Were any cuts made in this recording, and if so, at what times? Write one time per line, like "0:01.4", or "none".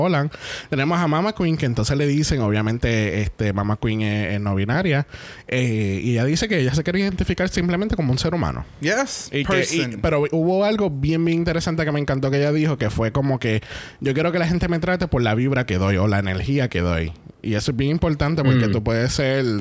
none